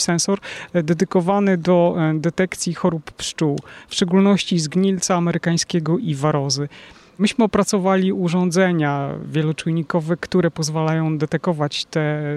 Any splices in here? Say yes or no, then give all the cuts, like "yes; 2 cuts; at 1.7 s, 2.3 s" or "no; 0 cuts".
yes; 1 cut; at 6.0 s